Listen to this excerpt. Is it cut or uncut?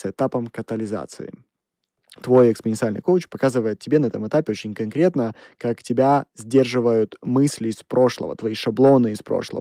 uncut